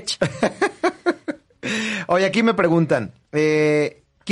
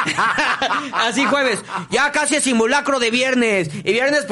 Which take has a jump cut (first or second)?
first